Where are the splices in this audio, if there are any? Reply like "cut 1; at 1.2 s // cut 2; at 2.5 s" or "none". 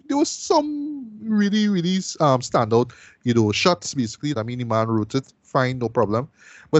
cut 1; at 4.3 s